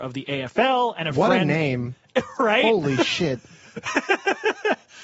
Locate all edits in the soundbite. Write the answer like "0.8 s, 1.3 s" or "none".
none

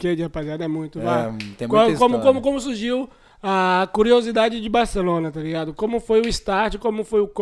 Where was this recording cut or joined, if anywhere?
none

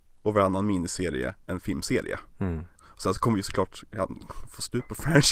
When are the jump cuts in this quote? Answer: 2.8 s

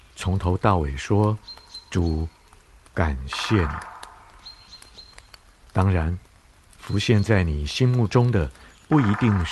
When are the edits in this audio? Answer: none

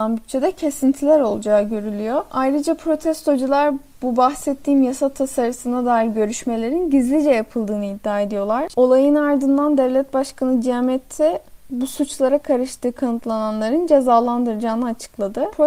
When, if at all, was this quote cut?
8.7 s

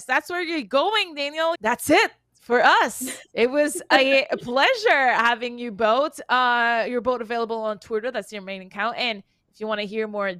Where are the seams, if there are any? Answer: 1.5 s

